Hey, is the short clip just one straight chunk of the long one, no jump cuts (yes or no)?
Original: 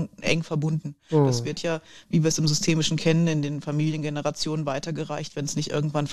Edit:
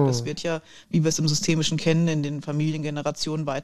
yes